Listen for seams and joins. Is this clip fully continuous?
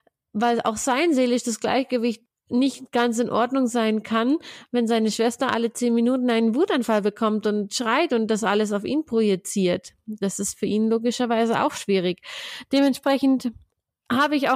yes; 0 cuts

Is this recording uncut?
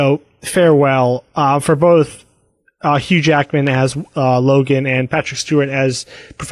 yes; 0 cuts

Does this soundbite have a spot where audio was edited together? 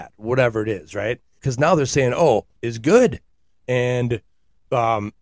yes; 2 cuts; at 1.4 s, 2.6 s

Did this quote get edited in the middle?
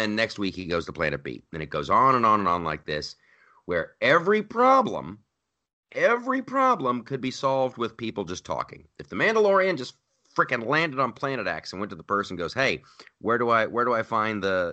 no; 0 cuts

